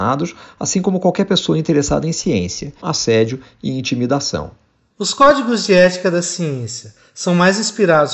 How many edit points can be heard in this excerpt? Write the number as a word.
one